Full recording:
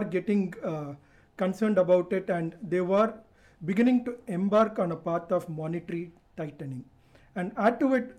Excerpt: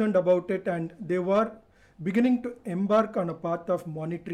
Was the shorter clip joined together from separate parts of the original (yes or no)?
no